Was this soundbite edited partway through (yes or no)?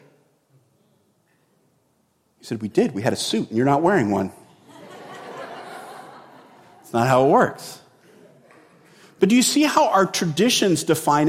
no